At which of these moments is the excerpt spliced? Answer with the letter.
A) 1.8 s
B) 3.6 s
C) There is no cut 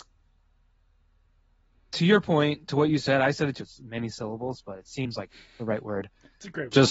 B